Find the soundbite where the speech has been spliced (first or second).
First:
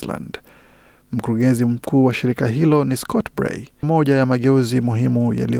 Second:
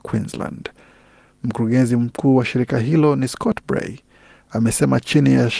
first